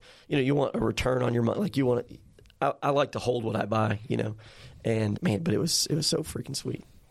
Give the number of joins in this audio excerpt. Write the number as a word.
one